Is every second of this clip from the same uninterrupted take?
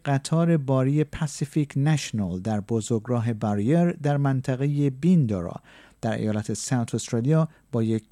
yes; 0 cuts

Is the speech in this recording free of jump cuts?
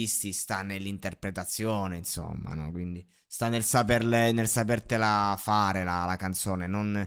yes; 0 cuts

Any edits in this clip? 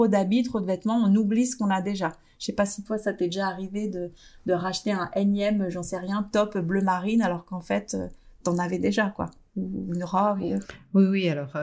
no; 0 cuts

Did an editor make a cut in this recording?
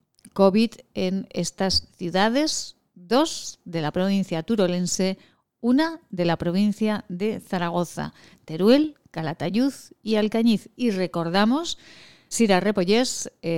yes; 2 cuts; at 10.7 s, 12.3 s

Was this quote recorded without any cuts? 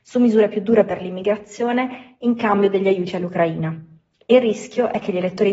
yes; 0 cuts

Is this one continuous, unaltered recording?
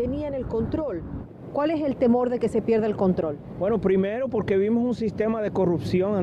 yes; 0 cuts

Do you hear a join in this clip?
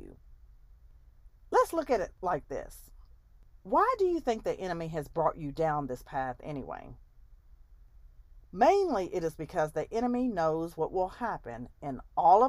no; 0 cuts

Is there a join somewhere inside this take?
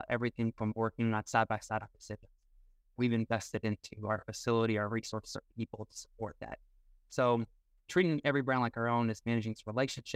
yes; 1 cut; at 3.0 s

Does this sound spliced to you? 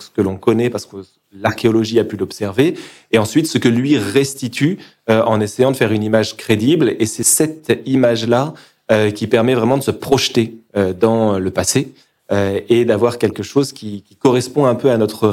no; 0 cuts

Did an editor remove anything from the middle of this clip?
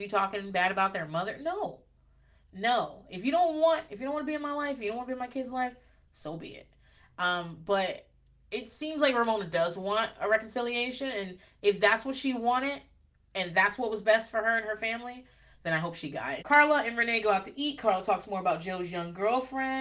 yes; 1 cut; at 16.4 s

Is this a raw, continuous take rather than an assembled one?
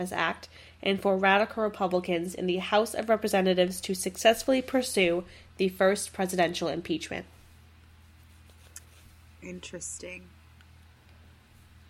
yes; 0 cuts

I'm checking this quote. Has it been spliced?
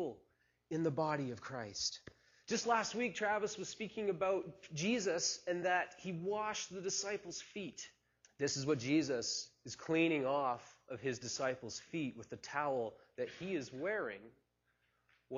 yes; 1 cut; at 8.2 s

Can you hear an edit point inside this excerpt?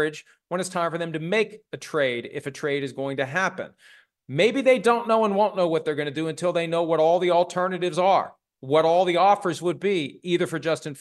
no; 0 cuts

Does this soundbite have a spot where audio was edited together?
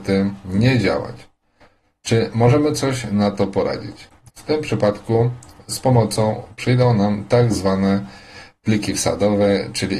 yes; 1 cut; at 4.3 s

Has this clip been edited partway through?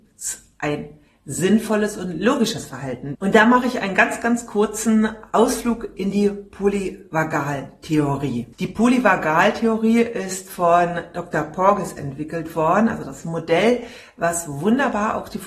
yes; 2 cuts; at 3.1 s, 8.5 s

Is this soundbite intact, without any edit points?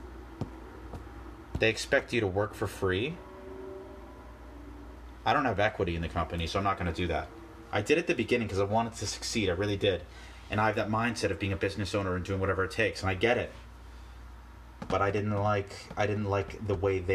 yes; 0 cuts

